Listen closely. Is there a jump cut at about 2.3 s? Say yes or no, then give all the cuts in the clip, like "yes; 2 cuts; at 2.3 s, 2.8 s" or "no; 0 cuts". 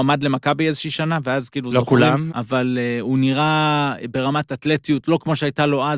yes; 1 cut; at 2.3 s